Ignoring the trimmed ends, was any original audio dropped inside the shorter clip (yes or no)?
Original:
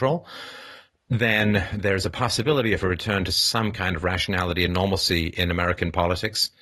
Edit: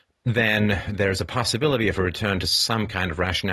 no